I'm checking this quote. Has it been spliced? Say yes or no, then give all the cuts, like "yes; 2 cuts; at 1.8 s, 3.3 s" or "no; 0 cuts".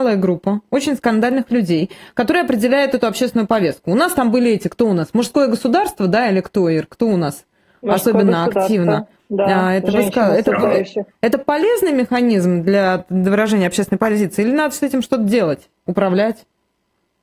yes; 1 cut; at 15.8 s